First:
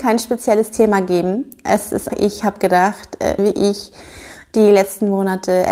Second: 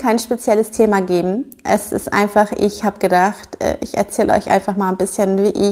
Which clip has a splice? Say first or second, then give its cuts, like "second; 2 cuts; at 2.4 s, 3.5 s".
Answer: first; 2 cuts; at 2.1 s, 3.4 s